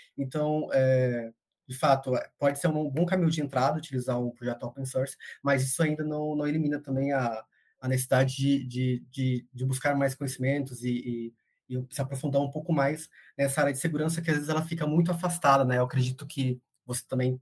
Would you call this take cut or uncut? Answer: uncut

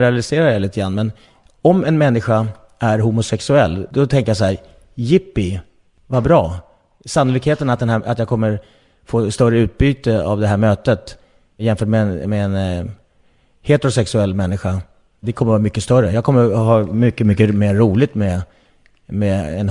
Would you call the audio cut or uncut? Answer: uncut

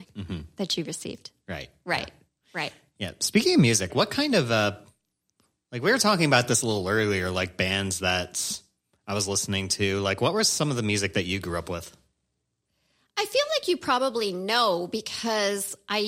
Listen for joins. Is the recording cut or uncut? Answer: cut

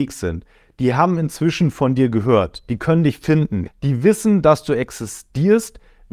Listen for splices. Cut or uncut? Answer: cut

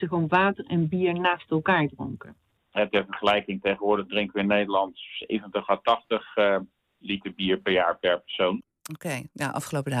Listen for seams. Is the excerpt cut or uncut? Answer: cut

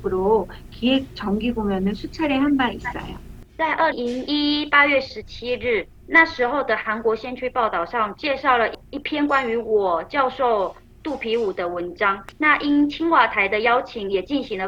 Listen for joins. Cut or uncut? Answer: cut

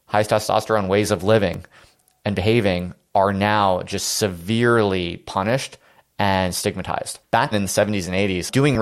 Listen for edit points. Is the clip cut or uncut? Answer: cut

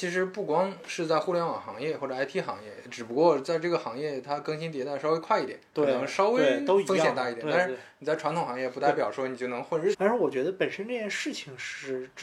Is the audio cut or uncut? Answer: cut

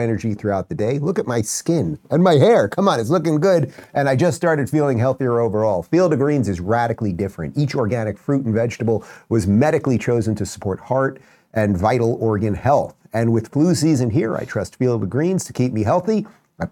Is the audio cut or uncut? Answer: uncut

